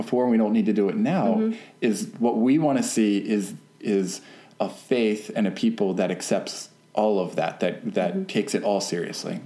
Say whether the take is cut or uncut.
uncut